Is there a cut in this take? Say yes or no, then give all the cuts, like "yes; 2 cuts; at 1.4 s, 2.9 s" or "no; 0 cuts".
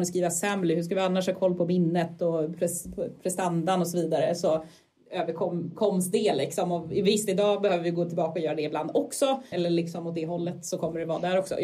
yes; 1 cut; at 9.5 s